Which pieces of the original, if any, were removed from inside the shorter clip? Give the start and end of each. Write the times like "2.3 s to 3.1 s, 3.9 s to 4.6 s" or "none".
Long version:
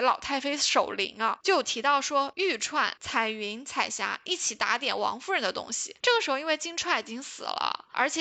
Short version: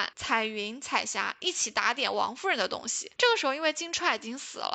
none